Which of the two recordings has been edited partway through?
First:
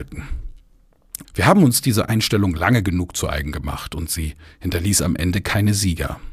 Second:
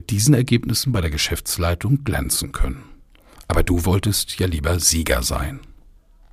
first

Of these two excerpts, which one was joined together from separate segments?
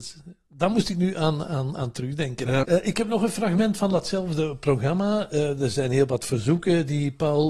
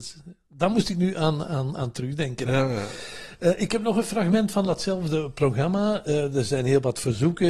first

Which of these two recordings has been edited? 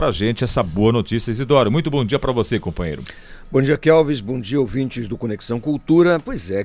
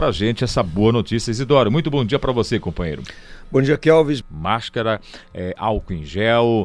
second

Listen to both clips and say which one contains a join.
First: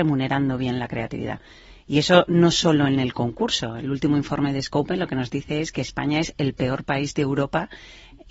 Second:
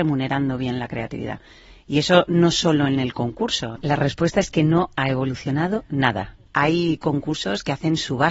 second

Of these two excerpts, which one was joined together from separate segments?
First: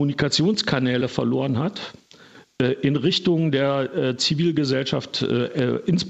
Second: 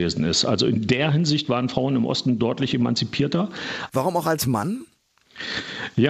second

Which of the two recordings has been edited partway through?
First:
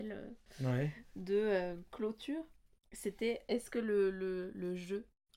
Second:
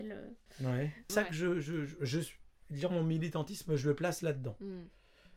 second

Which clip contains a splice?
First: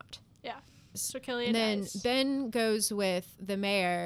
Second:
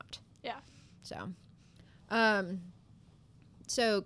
first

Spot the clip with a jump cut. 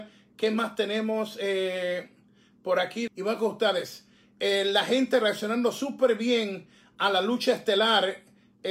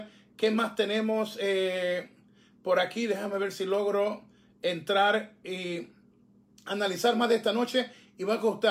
first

